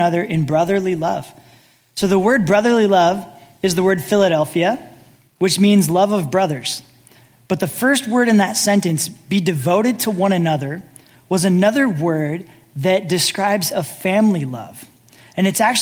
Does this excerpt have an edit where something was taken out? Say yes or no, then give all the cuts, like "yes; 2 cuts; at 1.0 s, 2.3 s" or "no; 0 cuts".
no; 0 cuts